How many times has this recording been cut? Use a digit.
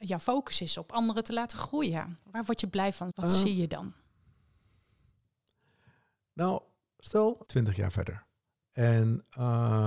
2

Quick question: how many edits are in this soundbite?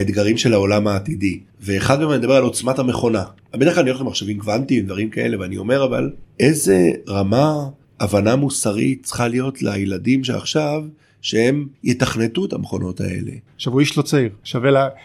2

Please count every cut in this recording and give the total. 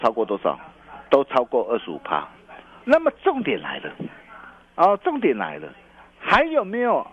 1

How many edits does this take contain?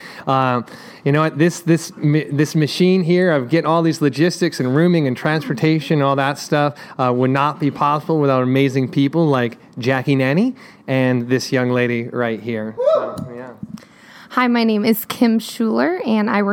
0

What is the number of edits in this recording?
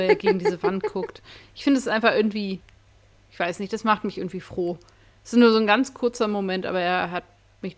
0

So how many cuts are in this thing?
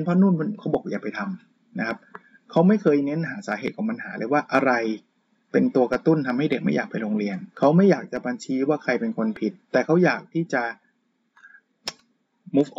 2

